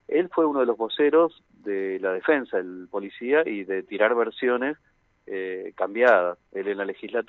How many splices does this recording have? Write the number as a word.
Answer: zero